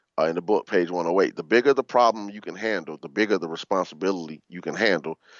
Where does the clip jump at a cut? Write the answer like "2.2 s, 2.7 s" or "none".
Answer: 3.0 s